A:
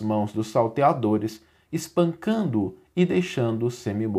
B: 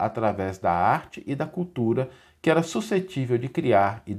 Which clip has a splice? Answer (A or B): A